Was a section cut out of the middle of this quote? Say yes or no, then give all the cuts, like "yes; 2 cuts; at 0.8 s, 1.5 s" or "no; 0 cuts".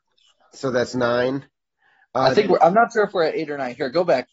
no; 0 cuts